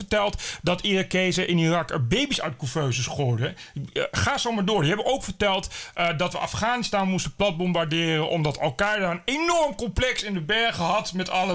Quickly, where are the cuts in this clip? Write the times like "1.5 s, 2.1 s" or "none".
none

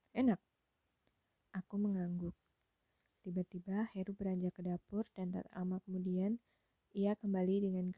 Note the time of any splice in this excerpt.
none

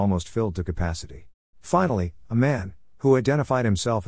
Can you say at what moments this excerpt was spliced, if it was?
1.5 s

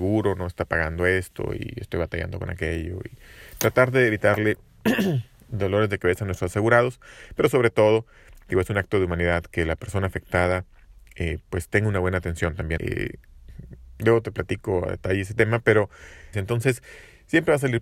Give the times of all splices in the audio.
12.8 s, 16.3 s

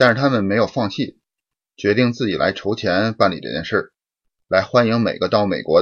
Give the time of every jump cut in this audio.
4.4 s

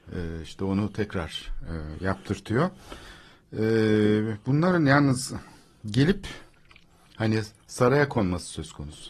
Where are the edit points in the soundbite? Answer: none

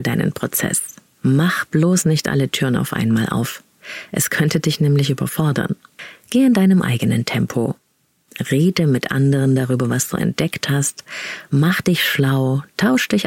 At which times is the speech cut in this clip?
none

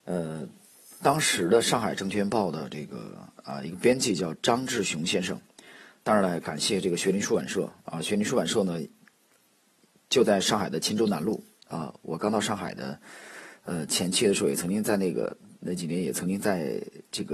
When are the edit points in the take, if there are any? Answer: none

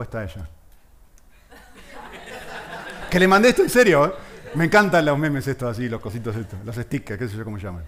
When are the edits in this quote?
none

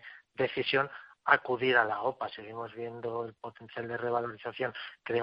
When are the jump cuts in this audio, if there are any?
none

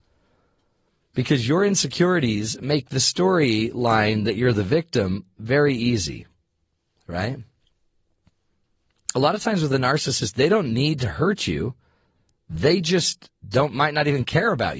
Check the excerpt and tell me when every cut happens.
none

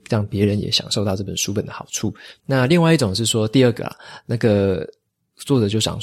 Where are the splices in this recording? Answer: 2.4 s

